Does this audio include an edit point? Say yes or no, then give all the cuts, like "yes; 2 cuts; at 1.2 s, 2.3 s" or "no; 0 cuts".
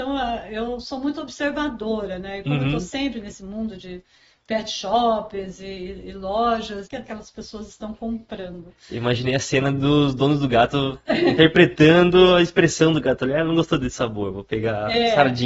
yes; 1 cut; at 6.9 s